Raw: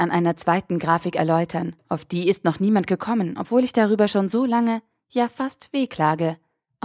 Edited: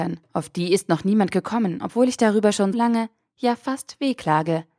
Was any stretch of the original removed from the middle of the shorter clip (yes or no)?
yes